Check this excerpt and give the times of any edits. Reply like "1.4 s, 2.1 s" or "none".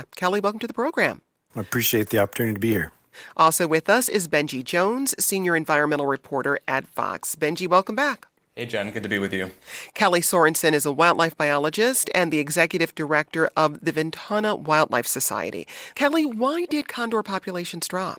9.9 s, 15.9 s